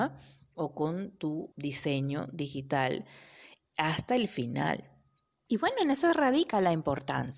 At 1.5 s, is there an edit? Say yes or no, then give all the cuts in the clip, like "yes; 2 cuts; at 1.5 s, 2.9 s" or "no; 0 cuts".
yes; 2 cuts; at 1.5 s, 5.5 s